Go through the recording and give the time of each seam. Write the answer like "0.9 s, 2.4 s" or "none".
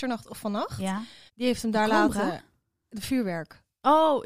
1.3 s